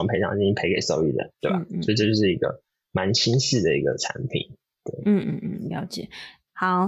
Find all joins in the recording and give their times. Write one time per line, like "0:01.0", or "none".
0:01.3
0:05.2